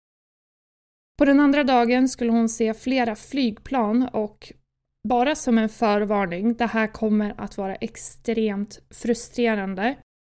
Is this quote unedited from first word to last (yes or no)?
no